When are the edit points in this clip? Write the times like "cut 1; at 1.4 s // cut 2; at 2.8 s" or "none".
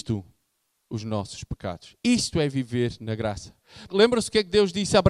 cut 1; at 3.9 s